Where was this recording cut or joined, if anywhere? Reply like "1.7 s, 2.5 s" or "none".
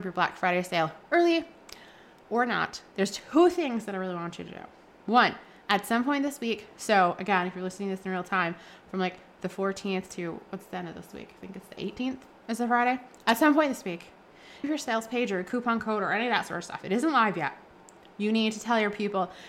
14.6 s